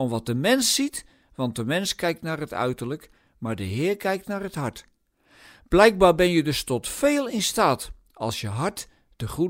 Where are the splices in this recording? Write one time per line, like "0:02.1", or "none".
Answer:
none